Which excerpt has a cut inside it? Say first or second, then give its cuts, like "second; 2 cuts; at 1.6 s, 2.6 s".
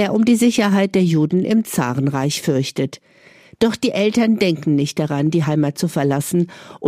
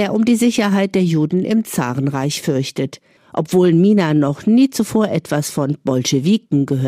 second; 1 cut; at 3.2 s